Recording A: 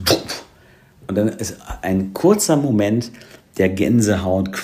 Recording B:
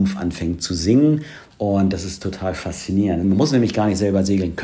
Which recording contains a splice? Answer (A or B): B